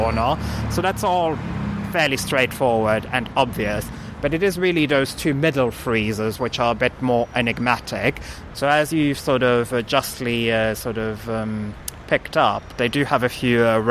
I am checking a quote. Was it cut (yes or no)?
yes